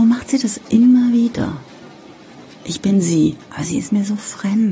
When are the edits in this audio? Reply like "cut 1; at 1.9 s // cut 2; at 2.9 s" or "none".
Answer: cut 1; at 3.4 s

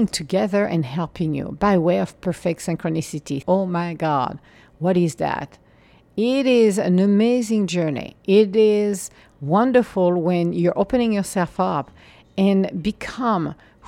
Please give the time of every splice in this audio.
cut 1; at 3.4 s

